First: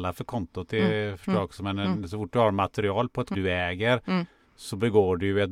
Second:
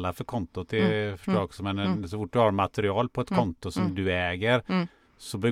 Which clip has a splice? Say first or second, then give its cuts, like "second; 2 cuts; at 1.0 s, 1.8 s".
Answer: first; 1 cut; at 3.3 s